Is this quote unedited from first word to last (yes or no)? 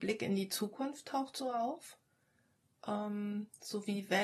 yes